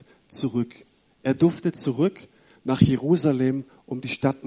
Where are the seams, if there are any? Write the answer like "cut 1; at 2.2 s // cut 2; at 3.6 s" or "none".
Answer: none